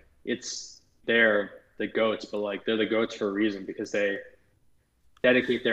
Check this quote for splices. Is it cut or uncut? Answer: cut